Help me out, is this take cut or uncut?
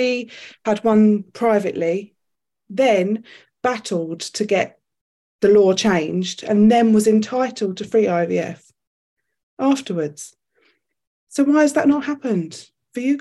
uncut